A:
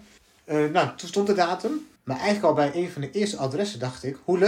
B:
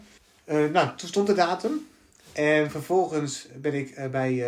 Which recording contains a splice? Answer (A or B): A